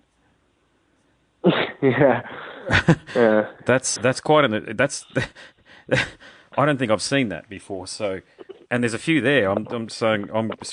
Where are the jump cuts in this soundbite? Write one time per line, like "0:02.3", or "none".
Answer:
0:04.0